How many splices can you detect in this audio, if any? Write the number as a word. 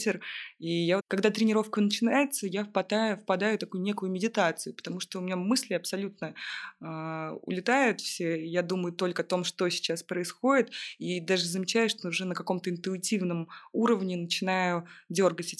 one